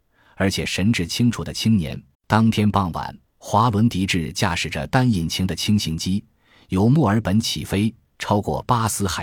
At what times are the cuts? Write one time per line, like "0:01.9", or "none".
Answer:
0:02.1
0:03.3